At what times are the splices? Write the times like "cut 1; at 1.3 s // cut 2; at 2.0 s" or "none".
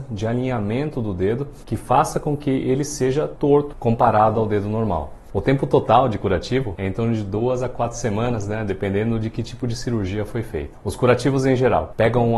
cut 1; at 5.3 s